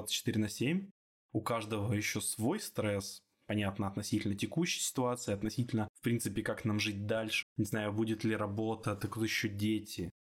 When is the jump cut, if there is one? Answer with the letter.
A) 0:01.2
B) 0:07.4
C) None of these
B